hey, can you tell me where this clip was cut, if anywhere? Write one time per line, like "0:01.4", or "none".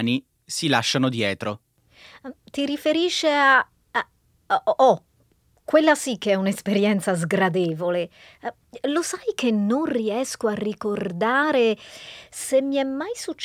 none